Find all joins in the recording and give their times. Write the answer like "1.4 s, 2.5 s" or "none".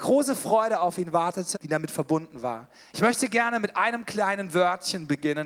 1.5 s, 2.9 s